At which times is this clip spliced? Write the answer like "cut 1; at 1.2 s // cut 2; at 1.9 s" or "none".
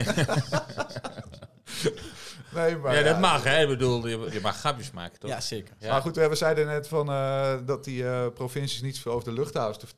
none